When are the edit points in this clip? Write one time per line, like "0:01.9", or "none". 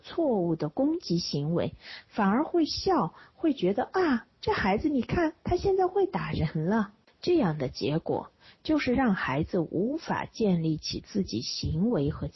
none